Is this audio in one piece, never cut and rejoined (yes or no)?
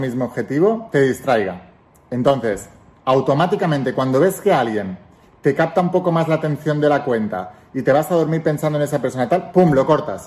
yes